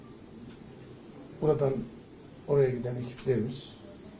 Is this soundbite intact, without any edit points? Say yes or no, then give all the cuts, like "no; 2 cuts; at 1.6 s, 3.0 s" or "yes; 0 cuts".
yes; 0 cuts